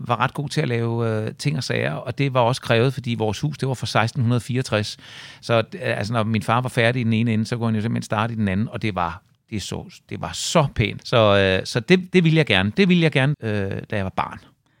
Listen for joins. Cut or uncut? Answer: cut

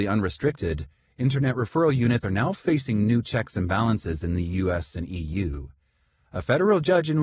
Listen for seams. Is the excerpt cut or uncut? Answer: uncut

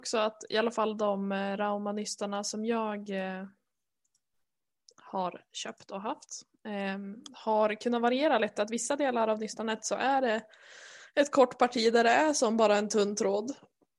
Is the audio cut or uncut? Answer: uncut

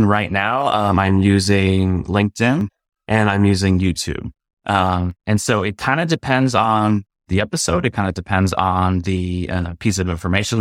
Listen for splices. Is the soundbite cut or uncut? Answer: uncut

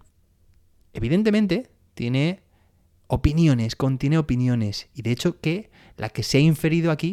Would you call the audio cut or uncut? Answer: uncut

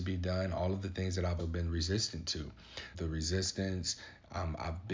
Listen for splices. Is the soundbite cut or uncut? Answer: cut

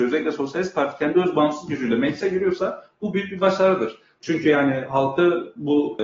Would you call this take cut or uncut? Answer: cut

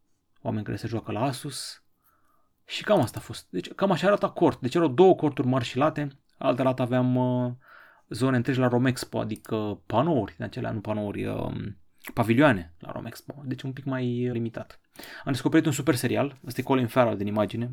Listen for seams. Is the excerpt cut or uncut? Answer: cut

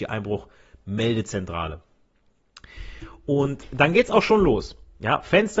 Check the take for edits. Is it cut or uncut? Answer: uncut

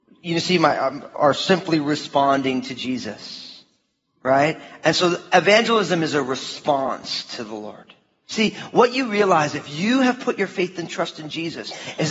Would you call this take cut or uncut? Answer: cut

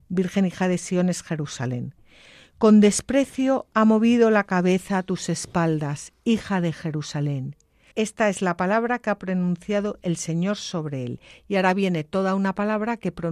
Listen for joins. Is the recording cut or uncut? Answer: cut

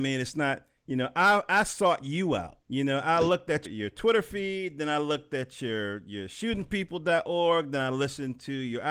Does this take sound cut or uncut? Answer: cut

